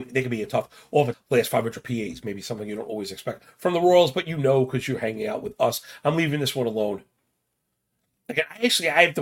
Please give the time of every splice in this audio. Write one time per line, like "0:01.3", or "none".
0:01.1